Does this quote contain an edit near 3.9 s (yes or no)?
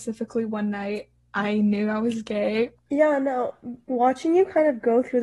yes